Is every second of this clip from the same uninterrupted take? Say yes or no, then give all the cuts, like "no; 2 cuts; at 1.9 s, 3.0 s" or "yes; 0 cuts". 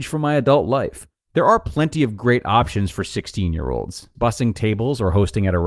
no; 2 cuts; at 1.3 s, 4.1 s